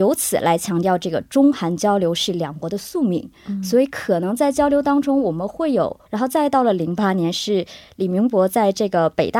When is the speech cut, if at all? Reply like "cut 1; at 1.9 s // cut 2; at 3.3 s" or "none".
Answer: cut 1; at 6.1 s